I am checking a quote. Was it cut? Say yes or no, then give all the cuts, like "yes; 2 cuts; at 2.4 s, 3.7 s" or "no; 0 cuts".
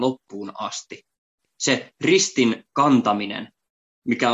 no; 0 cuts